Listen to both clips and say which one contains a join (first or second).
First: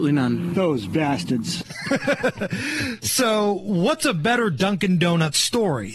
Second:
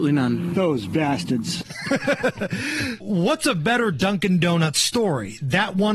second